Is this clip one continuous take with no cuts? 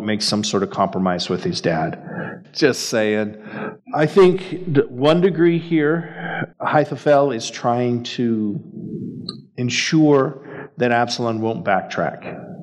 no; 3 cuts; at 2.4 s, 3.8 s, 6.5 s

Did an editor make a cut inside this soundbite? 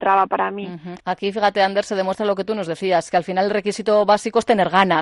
yes; 1 cut; at 1.0 s

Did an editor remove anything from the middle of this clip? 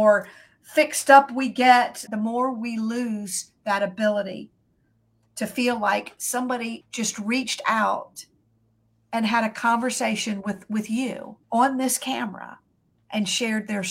yes; 3 cuts; at 2.1 s, 6.8 s, 11.4 s

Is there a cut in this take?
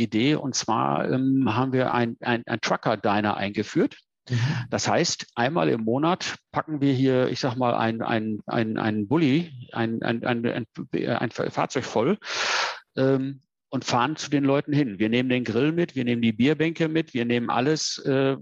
no; 0 cuts

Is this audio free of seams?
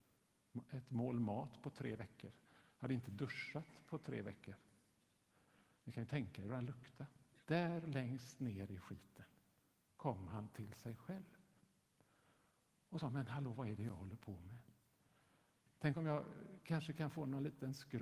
no; 1 cut; at 7.4 s

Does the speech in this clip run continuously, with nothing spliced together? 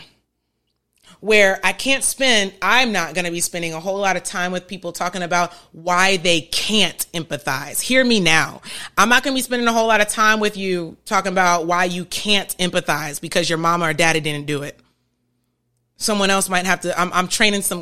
yes; 0 cuts

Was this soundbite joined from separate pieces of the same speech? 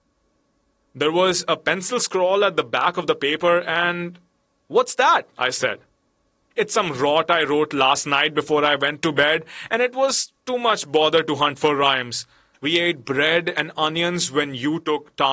yes; 2 cuts; at 6.5 s, 12.5 s

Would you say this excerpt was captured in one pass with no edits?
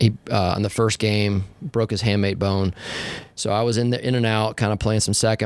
yes; 0 cuts

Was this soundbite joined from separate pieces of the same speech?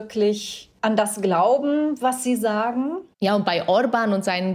yes; 1 cut; at 3.1 s

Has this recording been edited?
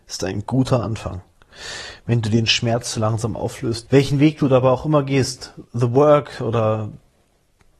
yes; 2 cuts; at 3.9 s, 5.7 s

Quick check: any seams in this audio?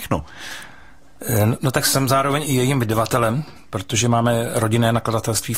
no; 0 cuts

